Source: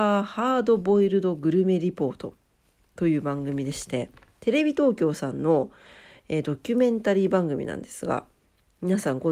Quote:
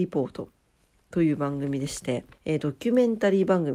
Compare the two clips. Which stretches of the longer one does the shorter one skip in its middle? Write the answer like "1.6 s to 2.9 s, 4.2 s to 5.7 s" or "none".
4.2 s to 6.2 s